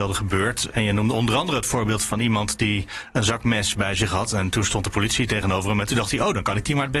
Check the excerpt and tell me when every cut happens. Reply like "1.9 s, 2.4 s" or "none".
none